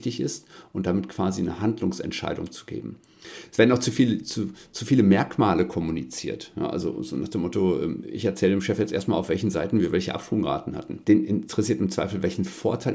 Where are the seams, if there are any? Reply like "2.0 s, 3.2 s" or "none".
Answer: 11.0 s